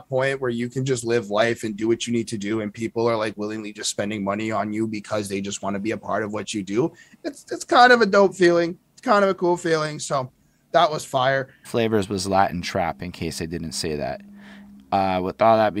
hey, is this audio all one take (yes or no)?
no